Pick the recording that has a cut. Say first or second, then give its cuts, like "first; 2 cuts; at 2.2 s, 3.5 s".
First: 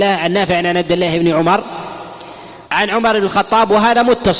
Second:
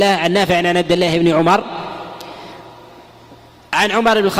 first; 1 cut; at 2.6 s